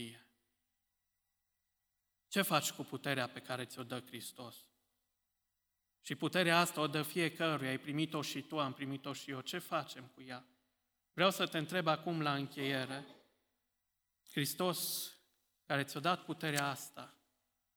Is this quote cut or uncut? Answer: uncut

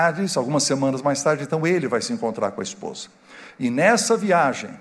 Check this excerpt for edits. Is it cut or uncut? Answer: uncut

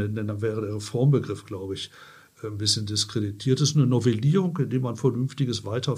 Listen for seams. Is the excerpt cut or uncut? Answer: uncut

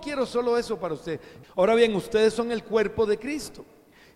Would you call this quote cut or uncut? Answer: cut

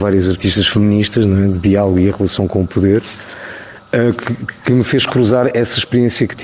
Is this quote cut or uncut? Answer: uncut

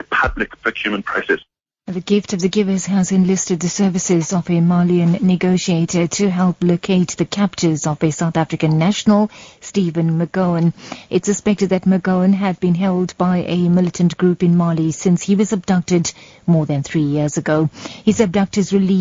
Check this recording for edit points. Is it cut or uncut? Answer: uncut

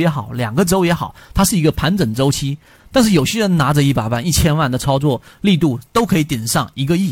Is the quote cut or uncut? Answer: cut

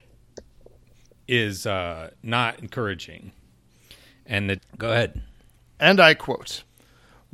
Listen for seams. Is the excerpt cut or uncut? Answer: cut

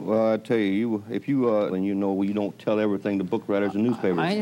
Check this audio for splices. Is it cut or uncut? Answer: cut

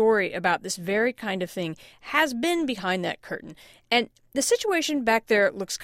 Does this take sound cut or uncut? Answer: uncut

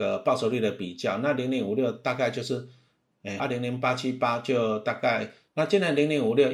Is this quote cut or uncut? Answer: cut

